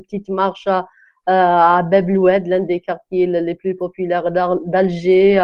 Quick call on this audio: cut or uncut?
uncut